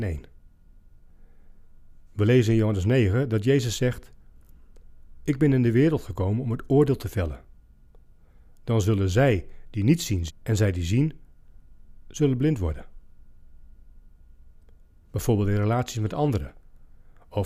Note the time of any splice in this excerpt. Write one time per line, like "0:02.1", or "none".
0:10.3
0:15.0